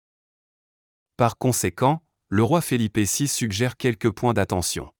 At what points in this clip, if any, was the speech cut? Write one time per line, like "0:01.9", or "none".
none